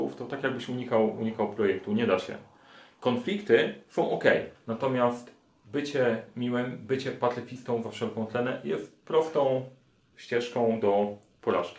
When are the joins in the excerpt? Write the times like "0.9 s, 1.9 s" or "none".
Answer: 4.5 s